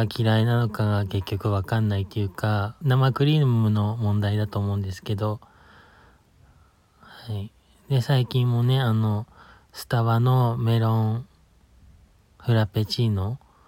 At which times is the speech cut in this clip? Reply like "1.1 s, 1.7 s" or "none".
2.8 s